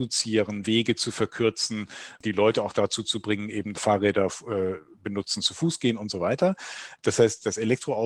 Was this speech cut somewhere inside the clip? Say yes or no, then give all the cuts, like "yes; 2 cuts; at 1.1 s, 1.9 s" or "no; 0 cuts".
yes; 1 cut; at 3.7 s